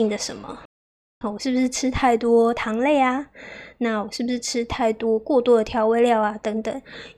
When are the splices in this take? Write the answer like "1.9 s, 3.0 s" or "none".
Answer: 1.2 s